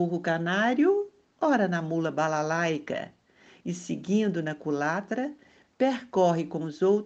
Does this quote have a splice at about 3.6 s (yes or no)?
no